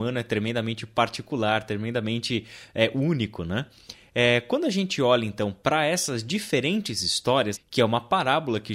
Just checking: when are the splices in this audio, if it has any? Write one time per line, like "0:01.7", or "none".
0:07.5